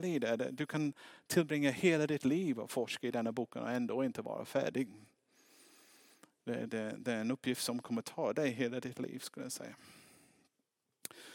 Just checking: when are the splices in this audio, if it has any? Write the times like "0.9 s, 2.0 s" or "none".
6.7 s